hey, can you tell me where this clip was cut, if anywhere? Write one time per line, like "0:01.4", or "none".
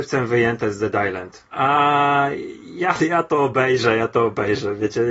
0:01.5